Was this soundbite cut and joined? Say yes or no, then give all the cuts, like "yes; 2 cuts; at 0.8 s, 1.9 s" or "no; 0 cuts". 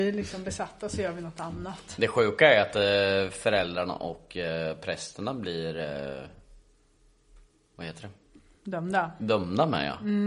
no; 0 cuts